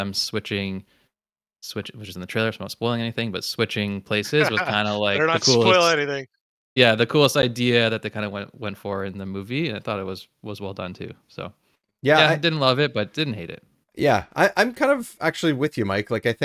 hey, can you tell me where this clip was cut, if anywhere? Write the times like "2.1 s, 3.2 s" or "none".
none